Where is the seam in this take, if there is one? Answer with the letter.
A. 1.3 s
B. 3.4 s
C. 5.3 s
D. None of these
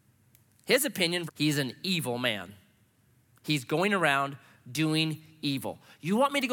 A